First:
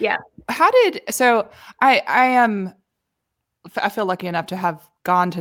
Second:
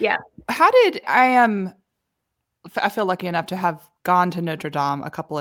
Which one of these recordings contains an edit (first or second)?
second